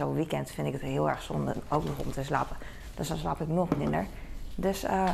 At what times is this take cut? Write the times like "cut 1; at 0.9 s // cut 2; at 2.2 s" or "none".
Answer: none